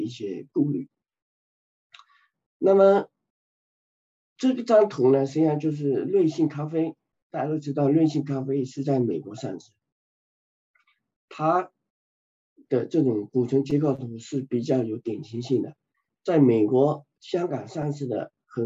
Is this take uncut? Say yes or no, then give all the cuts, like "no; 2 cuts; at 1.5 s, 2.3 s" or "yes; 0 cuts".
yes; 0 cuts